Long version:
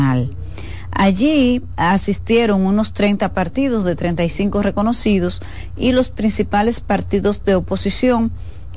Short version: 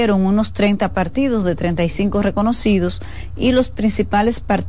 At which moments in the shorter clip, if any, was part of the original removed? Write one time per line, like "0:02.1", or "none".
none